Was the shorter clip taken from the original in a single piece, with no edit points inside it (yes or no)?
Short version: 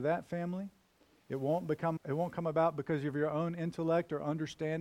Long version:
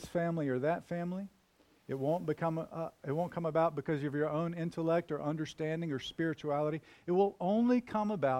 no